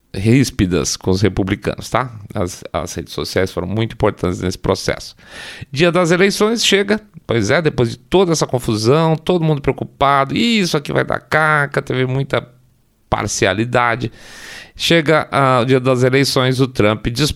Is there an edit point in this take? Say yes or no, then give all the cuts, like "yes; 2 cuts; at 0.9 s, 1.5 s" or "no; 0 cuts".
no; 0 cuts